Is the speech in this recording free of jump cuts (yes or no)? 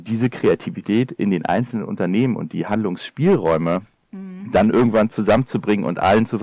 yes